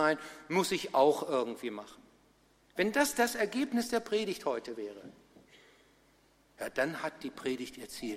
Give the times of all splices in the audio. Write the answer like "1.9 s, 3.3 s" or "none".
none